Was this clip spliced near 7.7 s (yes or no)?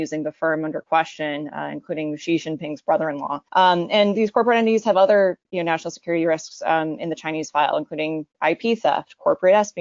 no